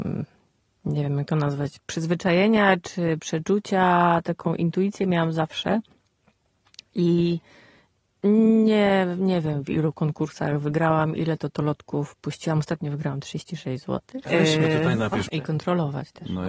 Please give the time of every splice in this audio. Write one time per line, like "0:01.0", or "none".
0:14.3
0:15.3